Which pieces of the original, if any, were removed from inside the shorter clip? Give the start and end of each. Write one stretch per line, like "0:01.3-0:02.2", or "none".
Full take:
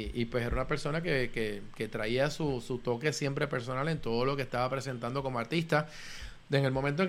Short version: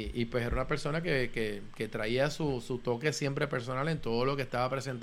none